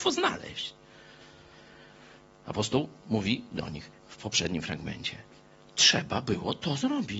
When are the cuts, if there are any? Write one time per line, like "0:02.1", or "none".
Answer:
0:04.0